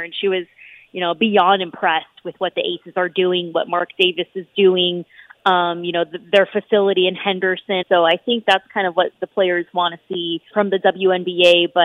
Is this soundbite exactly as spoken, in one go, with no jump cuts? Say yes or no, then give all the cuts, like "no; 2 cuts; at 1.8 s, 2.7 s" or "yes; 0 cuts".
no; 2 cuts; at 7.8 s, 10.5 s